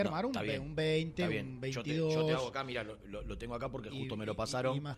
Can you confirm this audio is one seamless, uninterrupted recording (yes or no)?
yes